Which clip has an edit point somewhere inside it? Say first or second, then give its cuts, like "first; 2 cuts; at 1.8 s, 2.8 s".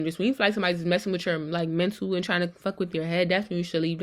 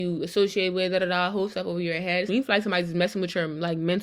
second; 1 cut; at 2.3 s